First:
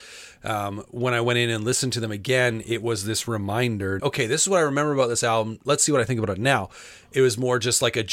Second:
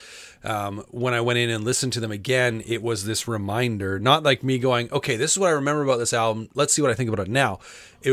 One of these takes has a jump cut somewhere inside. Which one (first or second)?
first